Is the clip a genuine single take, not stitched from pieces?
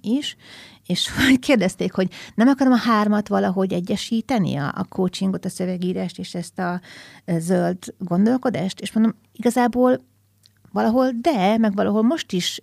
yes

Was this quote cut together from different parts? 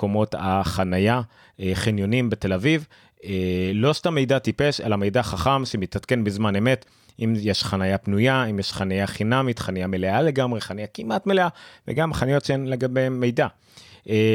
no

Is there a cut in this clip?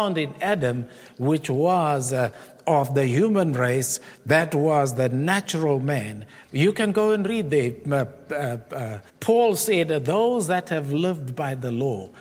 yes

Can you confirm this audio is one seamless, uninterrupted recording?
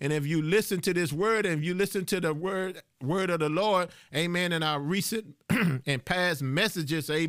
yes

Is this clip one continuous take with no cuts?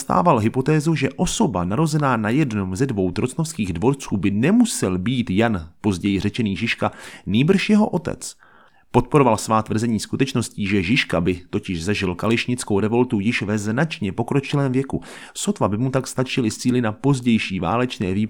yes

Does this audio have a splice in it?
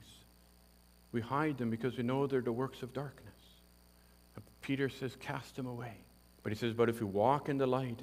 yes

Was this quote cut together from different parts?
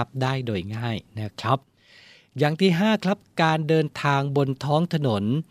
no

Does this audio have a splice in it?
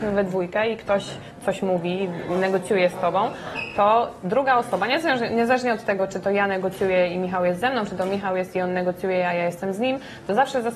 no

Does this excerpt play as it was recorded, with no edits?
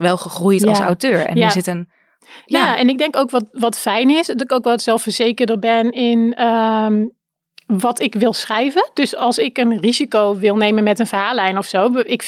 yes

